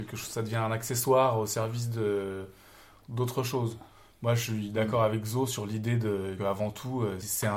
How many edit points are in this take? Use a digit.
1